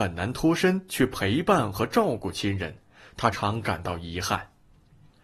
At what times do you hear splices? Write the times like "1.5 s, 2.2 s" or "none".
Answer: 3.3 s